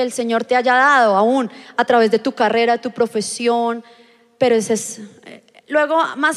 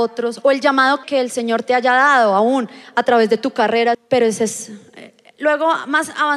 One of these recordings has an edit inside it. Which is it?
second; 2 cuts; at 1.0 s, 3.9 s

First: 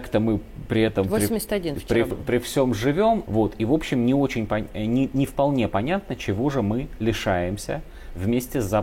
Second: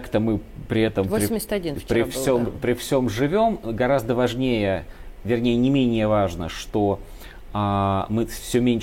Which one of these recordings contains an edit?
first; 2 cuts; at 2.1 s, 3.3 s

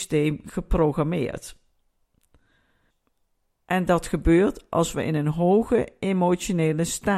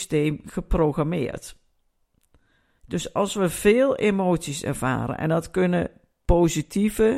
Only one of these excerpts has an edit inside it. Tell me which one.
second; 1 cut; at 2.8 s

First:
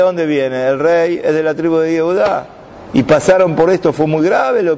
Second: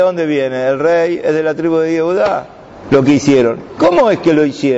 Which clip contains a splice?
second; 1 cut; at 2.8 s

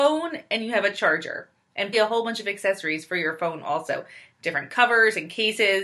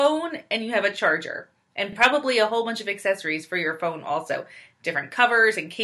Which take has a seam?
first; 1 cut; at 1.9 s

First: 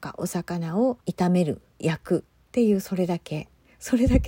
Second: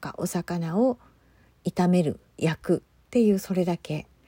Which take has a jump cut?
first; 1 cut; at 1.0 s

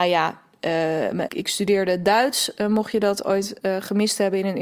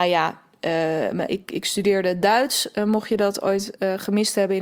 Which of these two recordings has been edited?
first; 1 cut; at 1.3 s

